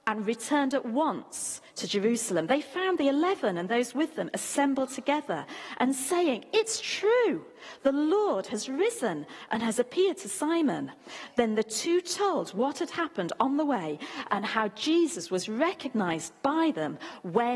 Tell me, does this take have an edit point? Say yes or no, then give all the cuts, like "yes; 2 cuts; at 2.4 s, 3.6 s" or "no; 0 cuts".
no; 0 cuts